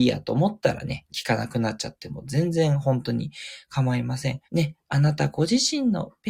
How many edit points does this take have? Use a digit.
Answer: 1